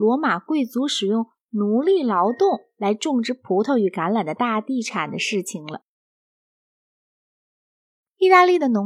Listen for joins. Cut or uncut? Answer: uncut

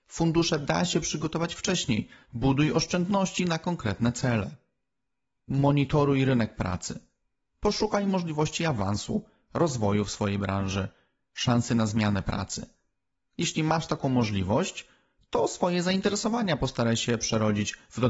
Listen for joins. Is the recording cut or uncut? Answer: uncut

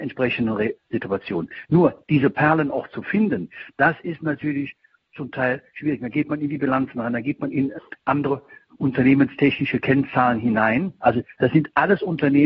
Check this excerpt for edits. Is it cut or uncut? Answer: cut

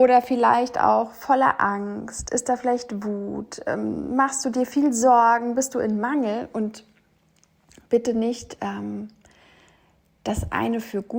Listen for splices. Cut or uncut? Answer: uncut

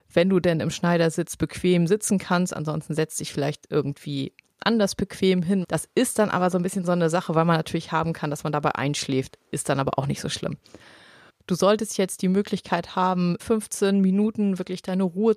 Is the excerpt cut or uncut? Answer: cut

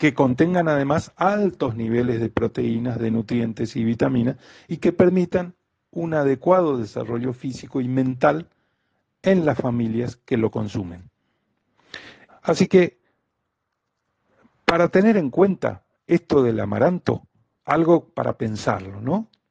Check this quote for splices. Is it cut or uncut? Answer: cut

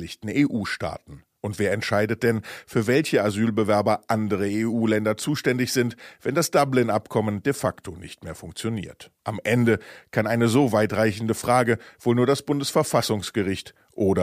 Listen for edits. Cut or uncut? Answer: uncut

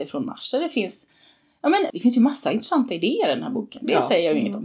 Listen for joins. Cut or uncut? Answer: cut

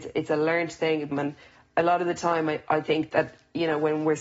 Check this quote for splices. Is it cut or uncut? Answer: cut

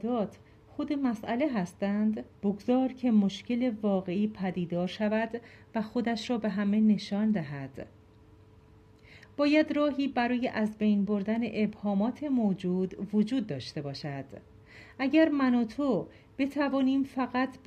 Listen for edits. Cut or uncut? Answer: cut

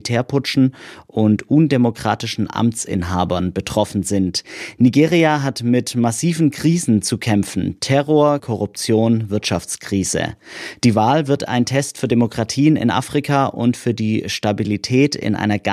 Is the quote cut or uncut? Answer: cut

